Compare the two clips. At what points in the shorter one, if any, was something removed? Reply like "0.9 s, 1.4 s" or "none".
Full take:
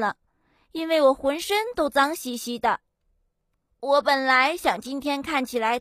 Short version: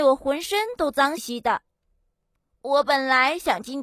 1.2 s